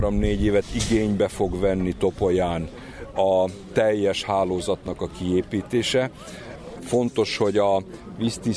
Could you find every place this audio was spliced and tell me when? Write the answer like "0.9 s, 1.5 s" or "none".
6.8 s